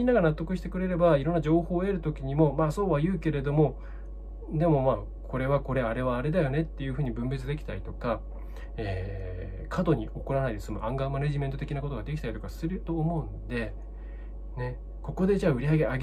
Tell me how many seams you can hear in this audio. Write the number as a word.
zero